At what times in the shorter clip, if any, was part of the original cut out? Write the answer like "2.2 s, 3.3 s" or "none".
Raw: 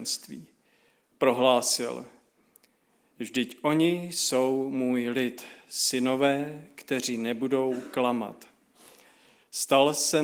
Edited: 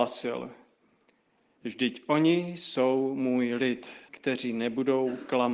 4.1 s